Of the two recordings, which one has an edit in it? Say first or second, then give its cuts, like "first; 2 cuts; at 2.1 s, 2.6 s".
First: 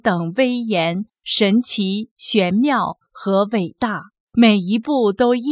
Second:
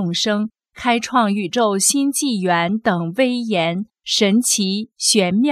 first; 1 cut; at 4.3 s